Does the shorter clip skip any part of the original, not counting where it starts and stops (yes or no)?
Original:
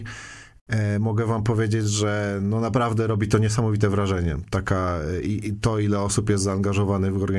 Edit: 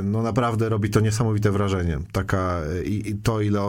no